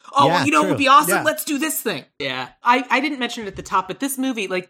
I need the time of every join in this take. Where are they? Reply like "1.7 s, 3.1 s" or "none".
2.2 s